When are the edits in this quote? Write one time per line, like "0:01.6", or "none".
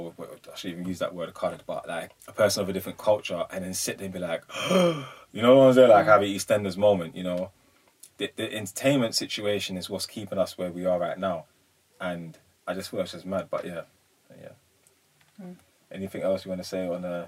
0:02.1